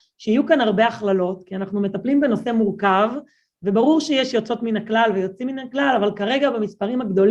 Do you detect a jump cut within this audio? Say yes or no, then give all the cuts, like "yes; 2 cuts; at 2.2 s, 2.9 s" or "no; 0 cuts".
no; 0 cuts